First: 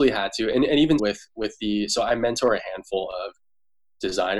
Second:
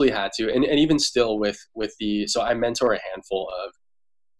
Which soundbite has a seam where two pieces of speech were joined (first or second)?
first